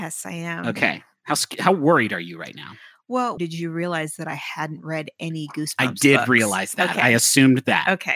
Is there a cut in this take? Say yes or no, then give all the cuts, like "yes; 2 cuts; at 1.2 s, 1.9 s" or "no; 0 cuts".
yes; 1 cut; at 3.4 s